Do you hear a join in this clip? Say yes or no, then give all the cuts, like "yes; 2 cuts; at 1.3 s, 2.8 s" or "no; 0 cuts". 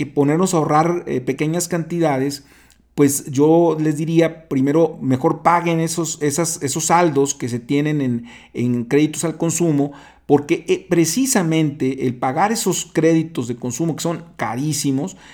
no; 0 cuts